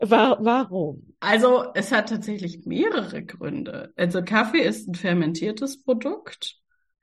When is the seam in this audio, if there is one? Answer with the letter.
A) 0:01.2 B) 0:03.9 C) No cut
A